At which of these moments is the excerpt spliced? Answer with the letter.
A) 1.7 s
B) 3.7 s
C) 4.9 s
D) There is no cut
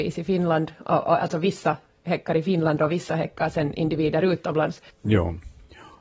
C